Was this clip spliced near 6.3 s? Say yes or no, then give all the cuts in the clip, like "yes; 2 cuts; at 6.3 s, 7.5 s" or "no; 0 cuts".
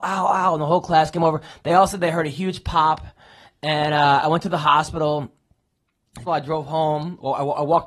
yes; 1 cut; at 6.3 s